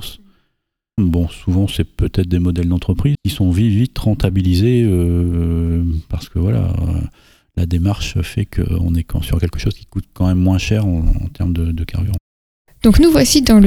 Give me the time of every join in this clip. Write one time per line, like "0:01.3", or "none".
0:01.0
0:03.1

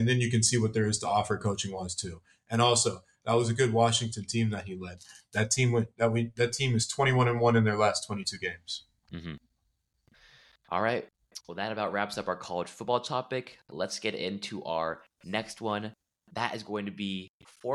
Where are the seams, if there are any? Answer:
none

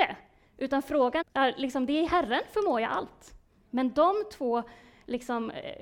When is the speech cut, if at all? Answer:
0:01.2
0:03.7

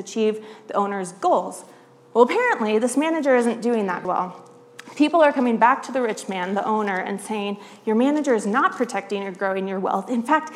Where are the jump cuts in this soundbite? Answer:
0:04.0

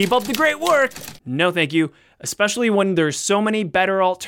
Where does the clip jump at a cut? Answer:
0:01.2

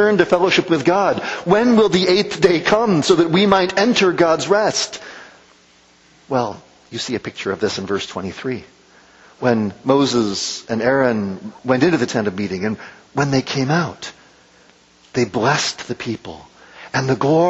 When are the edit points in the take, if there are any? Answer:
0:11.6

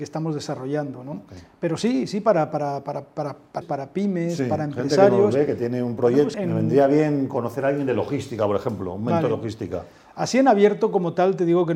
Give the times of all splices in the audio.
0:03.6
0:06.3

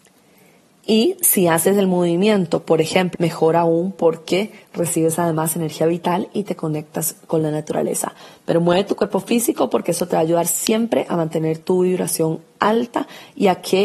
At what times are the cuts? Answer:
0:03.1

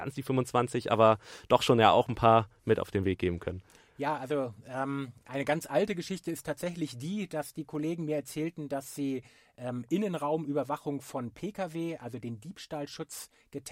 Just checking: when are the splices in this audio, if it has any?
none

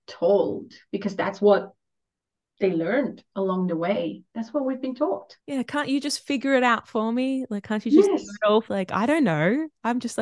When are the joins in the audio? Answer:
0:05.4
0:08.7

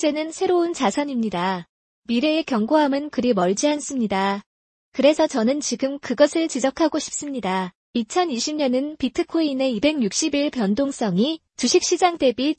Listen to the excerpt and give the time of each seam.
0:04.7
0:07.9

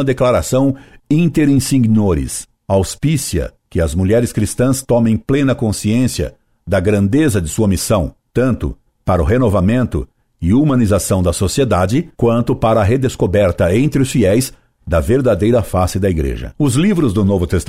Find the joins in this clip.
0:02.6
0:08.3
0:12.1

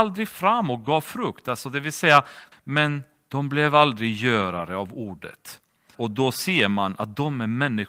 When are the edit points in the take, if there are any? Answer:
0:02.5
0:05.9

